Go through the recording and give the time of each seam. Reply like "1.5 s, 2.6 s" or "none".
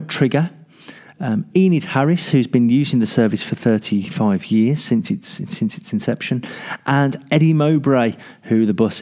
none